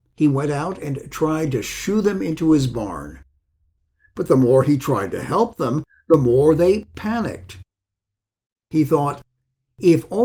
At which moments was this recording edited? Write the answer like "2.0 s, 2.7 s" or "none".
none